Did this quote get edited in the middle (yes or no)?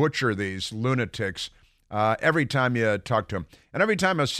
no